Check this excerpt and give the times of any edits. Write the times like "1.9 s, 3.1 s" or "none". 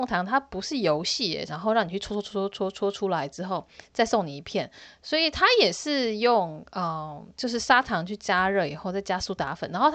1.5 s